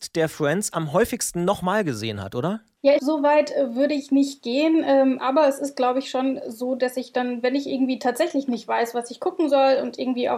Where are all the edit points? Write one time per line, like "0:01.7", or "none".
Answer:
0:03.0